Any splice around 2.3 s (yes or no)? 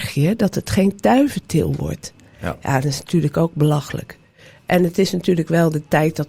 yes